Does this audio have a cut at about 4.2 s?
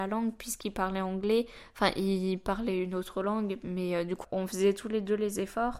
yes; 1 cut; at 4.2 s

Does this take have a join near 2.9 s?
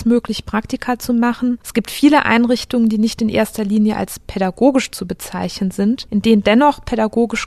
no; 1 cut; at 1.6 s

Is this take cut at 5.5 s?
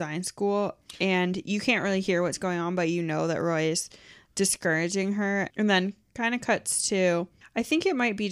no; 0 cuts

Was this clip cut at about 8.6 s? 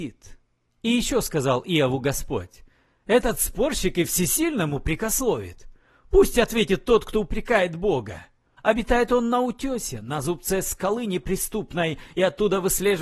yes; 1 cut; at 8.6 s

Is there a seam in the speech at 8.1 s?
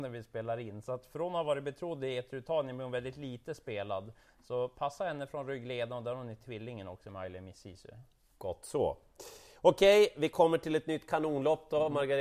no; 0 cuts

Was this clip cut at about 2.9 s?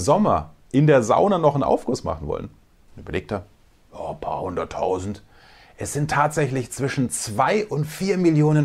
yes; 1 cut; at 2.9 s

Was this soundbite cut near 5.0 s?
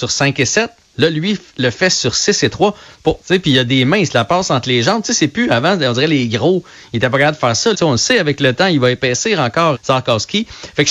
no; 3 cuts; at 3.2 s, 7.7 s, 9.7 s

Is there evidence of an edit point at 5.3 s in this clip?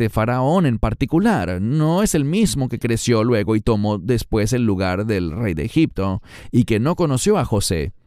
no; 0 cuts

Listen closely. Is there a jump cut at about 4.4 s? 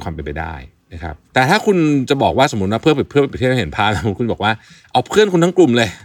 no; 1 cut; at 1.2 s

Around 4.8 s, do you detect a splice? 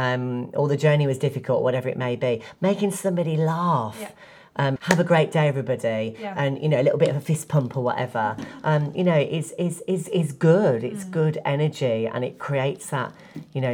yes; 1 cut; at 4.8 s

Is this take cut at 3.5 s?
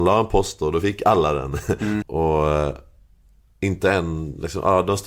no; 1 cut; at 2.0 s

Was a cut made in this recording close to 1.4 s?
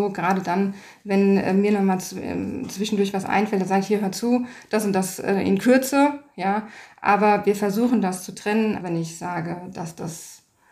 no; 1 cut; at 8.8 s

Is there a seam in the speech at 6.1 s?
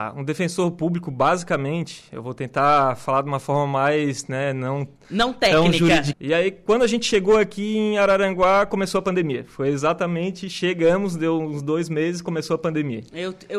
yes; 1 cut; at 6.1 s

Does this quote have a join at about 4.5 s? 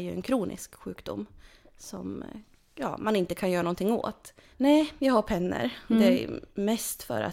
yes; 1 cut; at 4.5 s

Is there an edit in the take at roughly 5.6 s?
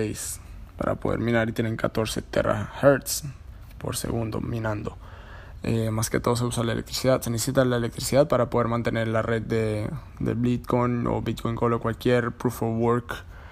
yes; 1 cut; at 5.6 s

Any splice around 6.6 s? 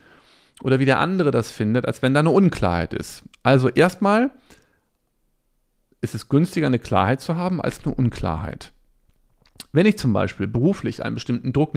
no; 0 cuts

